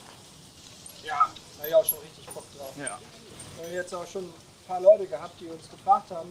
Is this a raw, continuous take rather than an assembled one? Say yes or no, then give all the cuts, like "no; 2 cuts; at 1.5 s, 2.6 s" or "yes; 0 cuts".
yes; 0 cuts